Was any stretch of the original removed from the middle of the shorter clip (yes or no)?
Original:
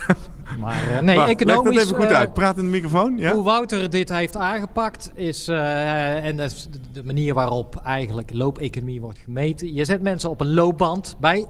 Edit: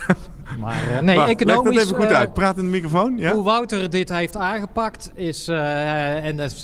no